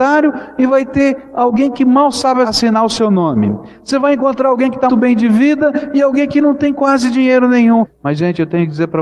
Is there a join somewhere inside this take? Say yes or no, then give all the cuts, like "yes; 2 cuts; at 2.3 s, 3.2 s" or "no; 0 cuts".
yes; 2 cuts; at 4.9 s, 7.8 s